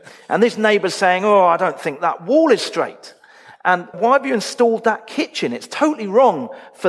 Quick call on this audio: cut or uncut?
cut